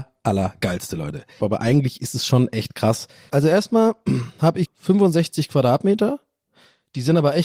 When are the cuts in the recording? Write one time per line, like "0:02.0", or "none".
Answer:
0:01.4
0:03.3
0:04.6